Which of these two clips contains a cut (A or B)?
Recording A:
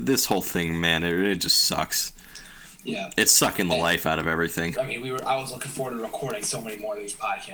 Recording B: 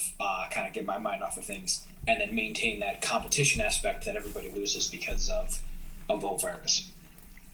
A